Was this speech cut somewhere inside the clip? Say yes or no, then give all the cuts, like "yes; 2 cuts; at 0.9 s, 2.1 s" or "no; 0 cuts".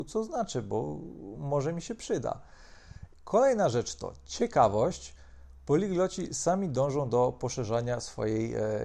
yes; 1 cut; at 3.1 s